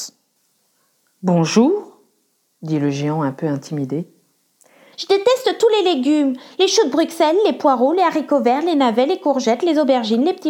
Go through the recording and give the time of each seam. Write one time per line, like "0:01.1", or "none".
0:04.9